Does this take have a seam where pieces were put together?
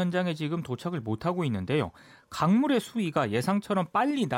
no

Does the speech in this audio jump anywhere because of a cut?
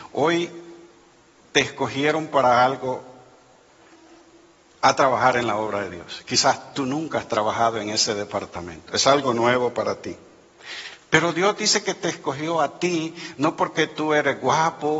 no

